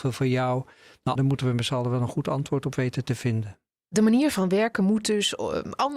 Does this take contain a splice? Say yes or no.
yes